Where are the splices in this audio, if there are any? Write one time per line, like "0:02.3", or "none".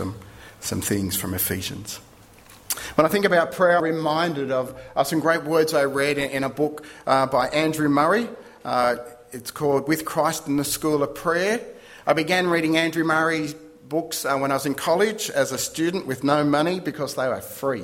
0:03.8